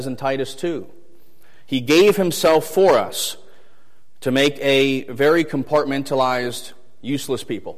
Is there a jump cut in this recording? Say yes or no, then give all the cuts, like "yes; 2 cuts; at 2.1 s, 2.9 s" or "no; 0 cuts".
no; 0 cuts